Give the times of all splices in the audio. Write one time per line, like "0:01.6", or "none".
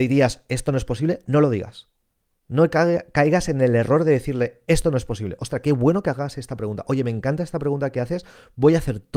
none